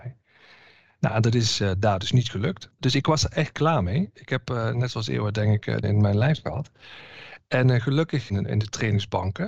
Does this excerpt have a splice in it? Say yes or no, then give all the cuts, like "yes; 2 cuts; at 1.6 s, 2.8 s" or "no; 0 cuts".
yes; 2 cuts; at 5.8 s, 8.3 s